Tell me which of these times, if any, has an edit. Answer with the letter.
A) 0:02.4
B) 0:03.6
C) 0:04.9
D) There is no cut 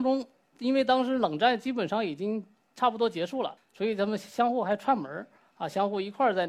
B